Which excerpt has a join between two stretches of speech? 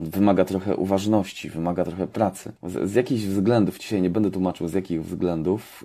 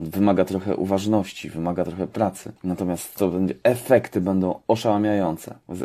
first; 1 cut; at 2.5 s

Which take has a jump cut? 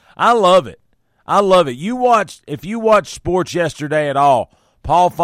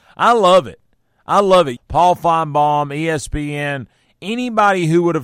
second; 1 cut; at 1.8 s

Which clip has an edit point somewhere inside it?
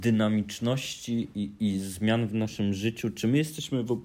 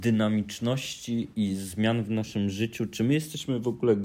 second; 1 cut; at 1.3 s

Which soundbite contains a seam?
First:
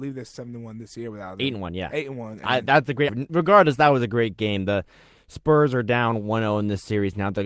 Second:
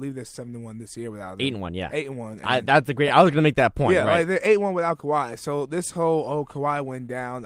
first; 1 cut; at 3.1 s

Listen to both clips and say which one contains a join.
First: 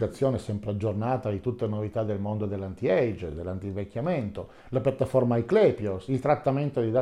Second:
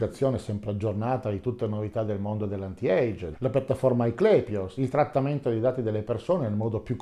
second; 1 cut; at 3.3 s

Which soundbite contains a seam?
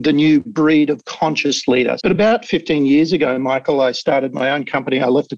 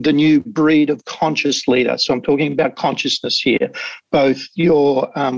first; 1 cut; at 2.0 s

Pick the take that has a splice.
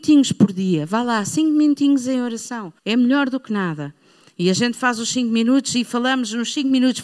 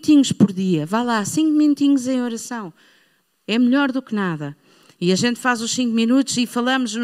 first; 1 cut; at 2.8 s

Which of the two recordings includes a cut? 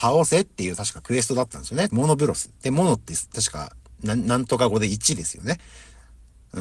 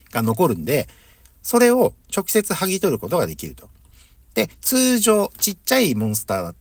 first; 1 cut; at 1.9 s

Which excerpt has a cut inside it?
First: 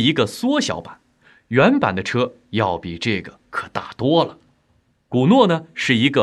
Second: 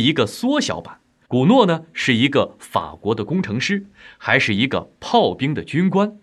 second; 1 cut; at 1.2 s

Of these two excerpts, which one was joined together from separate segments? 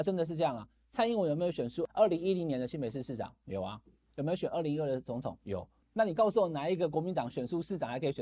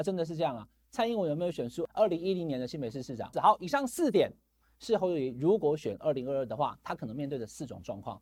second; 1 cut; at 3.3 s

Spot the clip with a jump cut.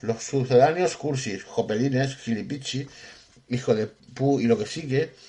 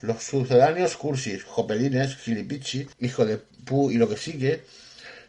second; 1 cut; at 2.9 s

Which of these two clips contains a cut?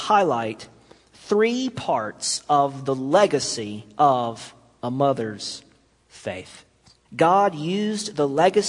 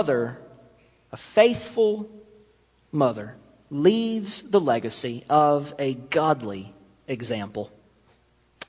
first; 1 cut; at 7.0 s

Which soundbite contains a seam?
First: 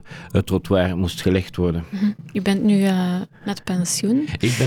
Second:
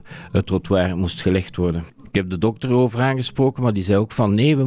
second; 1 cut; at 1.9 s

